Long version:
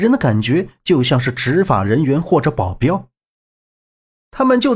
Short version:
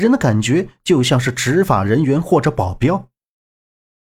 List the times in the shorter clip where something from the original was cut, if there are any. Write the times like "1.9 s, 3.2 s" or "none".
none